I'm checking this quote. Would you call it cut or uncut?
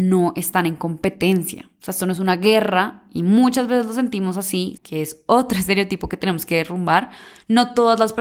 cut